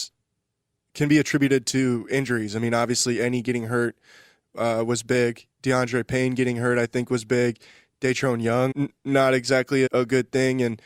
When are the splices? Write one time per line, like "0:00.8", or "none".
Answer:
0:08.7
0:09.9